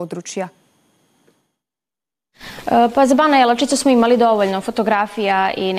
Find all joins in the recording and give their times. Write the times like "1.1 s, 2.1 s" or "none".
none